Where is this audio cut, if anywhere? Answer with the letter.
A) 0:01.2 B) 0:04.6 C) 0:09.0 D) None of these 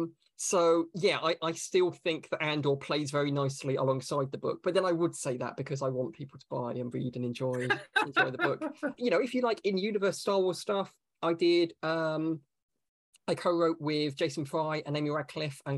C